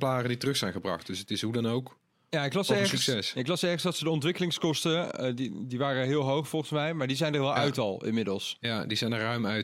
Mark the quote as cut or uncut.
uncut